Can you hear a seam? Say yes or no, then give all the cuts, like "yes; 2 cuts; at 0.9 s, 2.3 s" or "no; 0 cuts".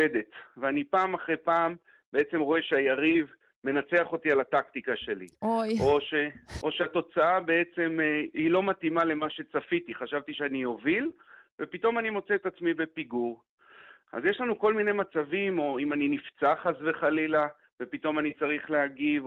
no; 0 cuts